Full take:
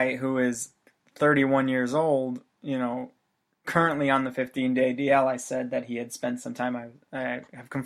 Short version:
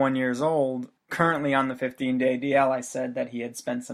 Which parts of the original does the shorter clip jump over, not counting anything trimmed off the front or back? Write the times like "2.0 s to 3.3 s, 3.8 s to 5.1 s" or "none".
2.5 s to 3.5 s